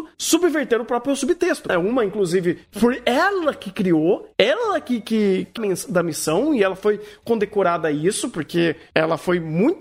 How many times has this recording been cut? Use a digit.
2